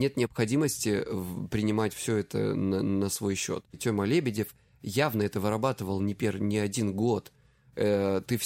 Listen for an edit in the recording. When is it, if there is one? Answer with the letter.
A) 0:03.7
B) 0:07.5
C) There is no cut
A